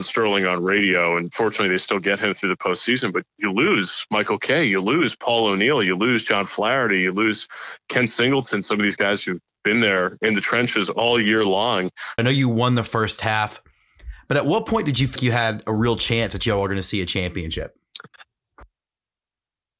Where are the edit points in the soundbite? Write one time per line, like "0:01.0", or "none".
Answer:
0:12.2
0:15.2